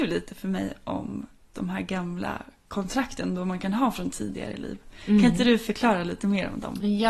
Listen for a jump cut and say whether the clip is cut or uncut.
cut